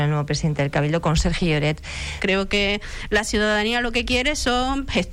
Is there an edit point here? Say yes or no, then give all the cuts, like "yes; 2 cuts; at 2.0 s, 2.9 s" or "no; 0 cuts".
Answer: yes; 1 cut; at 2.2 s